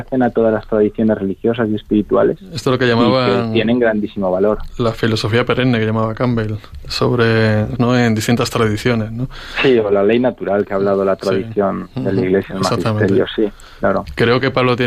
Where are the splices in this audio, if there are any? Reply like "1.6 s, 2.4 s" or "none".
7.8 s